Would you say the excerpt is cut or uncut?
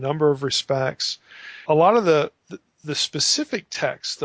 cut